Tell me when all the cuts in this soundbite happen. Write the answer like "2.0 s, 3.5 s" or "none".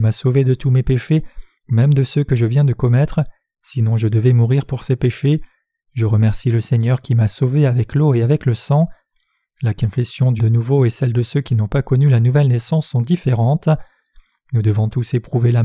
10.4 s

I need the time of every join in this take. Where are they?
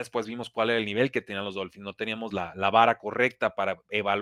none

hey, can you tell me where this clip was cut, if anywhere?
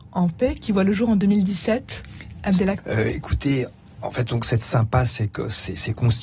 2.8 s

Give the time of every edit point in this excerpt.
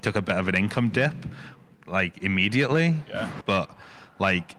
3.4 s

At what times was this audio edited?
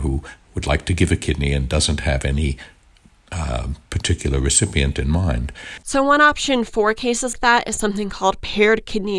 5.8 s, 7.3 s

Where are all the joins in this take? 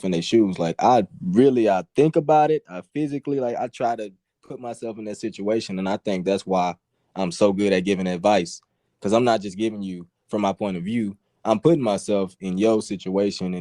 none

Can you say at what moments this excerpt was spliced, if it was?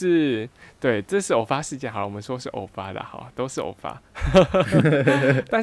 none

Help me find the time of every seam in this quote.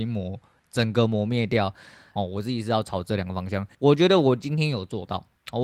2.2 s, 3.7 s

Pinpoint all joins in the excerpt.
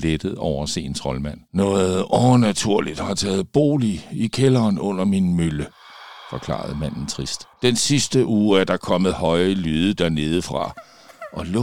1.5 s, 7.5 s

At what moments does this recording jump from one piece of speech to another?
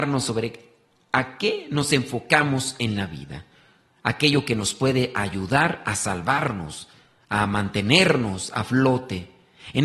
none

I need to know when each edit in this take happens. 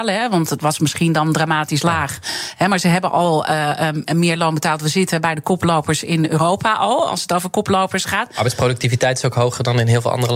none

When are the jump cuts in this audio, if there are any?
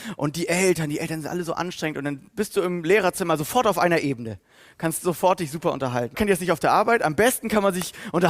6.1 s

